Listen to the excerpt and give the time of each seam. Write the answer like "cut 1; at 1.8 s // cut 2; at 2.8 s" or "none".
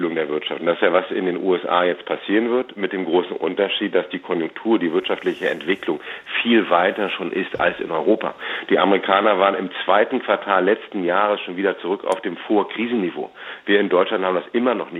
none